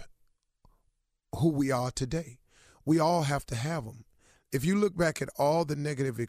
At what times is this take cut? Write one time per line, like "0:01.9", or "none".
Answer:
none